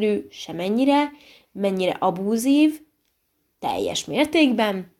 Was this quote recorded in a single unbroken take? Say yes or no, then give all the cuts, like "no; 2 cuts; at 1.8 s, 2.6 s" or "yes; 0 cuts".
yes; 0 cuts